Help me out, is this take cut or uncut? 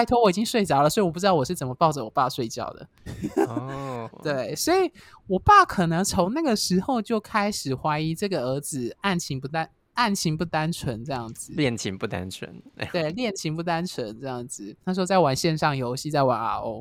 cut